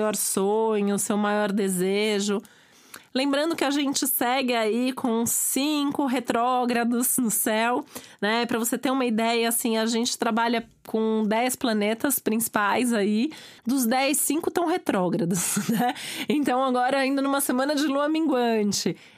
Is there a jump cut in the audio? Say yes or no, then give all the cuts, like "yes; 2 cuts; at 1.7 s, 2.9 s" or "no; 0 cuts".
yes; 1 cut; at 13.6 s